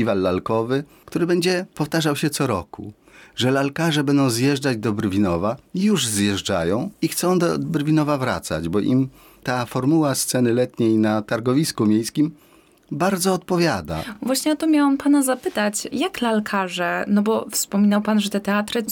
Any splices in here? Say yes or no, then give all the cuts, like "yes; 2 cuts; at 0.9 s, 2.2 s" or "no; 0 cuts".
no; 0 cuts